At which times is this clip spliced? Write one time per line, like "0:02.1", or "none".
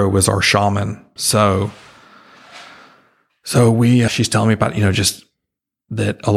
0:01.2
0:04.1